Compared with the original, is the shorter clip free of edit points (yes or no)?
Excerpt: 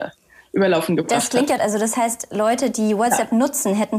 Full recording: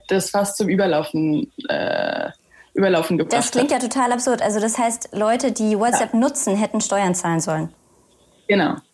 no